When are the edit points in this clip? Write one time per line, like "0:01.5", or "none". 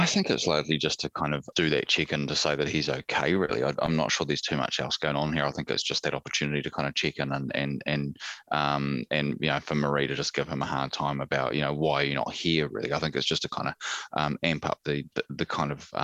0:01.5